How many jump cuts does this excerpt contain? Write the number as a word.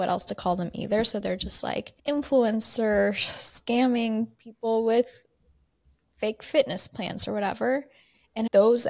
one